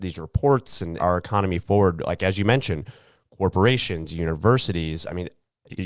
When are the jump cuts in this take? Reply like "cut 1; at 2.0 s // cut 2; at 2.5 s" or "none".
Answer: cut 1; at 1.0 s